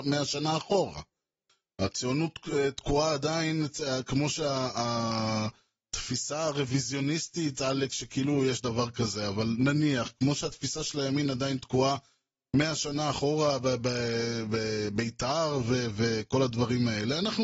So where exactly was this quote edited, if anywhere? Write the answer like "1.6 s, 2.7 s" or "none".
none